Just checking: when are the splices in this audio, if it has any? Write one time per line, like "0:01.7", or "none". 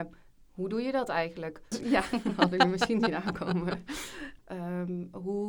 0:01.7
0:04.4